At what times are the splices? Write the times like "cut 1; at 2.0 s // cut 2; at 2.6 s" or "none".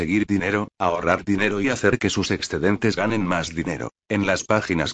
cut 1; at 4.0 s